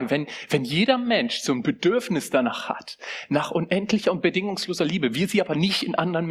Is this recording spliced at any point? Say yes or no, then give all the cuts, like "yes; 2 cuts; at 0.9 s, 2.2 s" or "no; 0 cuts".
no; 0 cuts